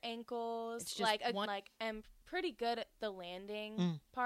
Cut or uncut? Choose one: cut